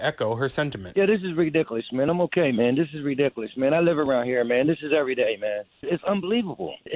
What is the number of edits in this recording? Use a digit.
0